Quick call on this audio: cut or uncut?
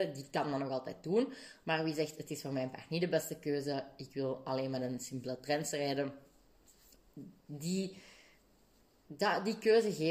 uncut